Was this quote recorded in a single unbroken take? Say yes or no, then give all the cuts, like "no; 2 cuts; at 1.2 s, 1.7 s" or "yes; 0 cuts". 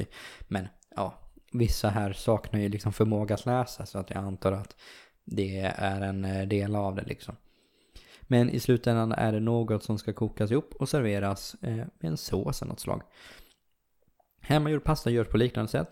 yes; 0 cuts